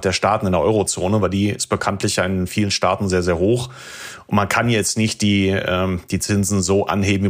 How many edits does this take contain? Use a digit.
0